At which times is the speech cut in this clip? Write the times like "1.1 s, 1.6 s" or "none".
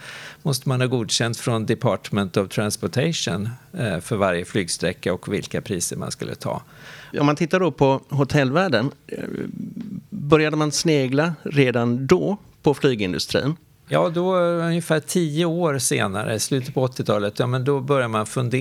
7.1 s